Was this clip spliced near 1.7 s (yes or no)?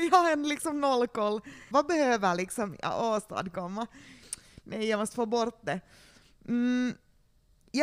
yes